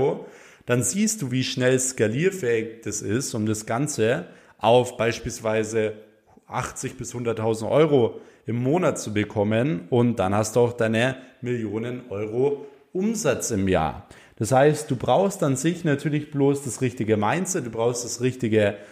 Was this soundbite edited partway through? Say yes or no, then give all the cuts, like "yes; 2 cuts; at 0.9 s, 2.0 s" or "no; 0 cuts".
no; 0 cuts